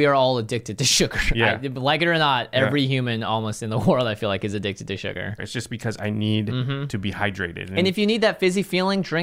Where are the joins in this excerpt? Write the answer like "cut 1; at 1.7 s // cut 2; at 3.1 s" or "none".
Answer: cut 1; at 5.4 s

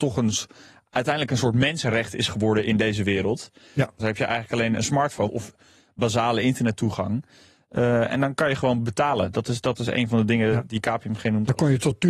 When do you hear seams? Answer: cut 1; at 4.0 s // cut 2; at 5.3 s

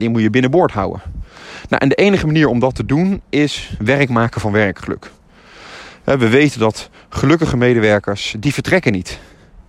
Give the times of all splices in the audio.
none

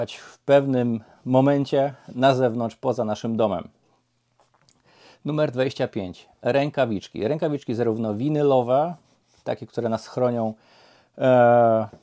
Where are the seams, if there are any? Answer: none

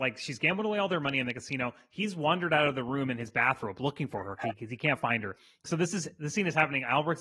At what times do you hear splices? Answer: none

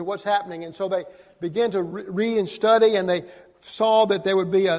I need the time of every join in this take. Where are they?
none

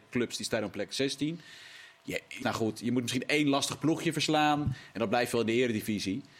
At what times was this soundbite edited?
cut 1; at 2.4 s

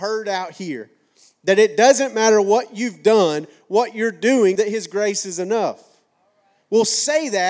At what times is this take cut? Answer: cut 1; at 4.6 s

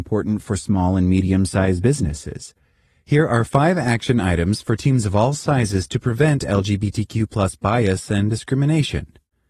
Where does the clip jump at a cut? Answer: none

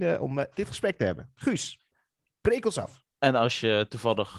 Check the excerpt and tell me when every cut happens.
cut 1; at 3.1 s

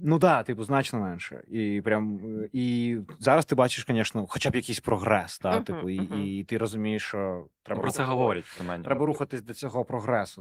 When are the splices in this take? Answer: none

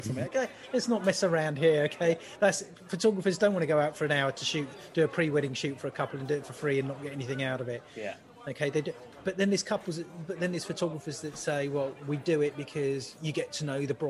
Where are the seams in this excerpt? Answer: none

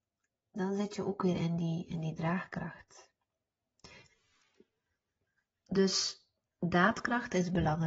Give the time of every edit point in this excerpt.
none

